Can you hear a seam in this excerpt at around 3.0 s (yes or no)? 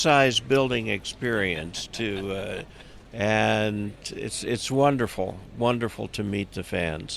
yes